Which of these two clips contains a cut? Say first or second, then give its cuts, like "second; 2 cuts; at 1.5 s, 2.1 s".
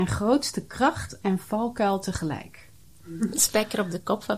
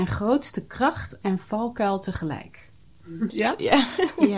second; 1 cut; at 3.3 s